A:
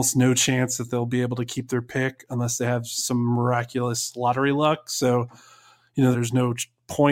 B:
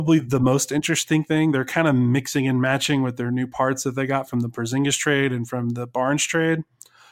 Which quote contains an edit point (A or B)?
A